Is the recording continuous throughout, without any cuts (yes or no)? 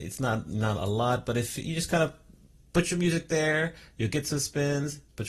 yes